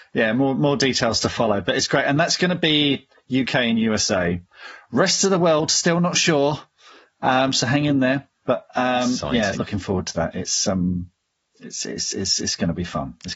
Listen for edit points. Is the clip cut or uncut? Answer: cut